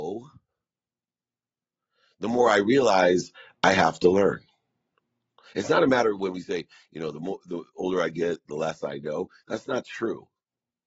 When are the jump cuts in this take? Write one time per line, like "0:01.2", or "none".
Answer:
none